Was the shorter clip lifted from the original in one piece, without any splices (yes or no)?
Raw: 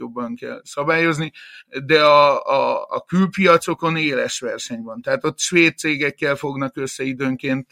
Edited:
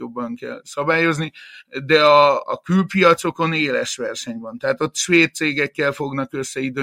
no